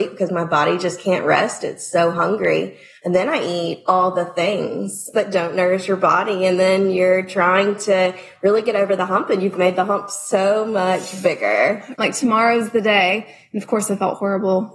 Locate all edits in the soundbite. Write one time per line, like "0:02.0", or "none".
0:05.1
0:12.0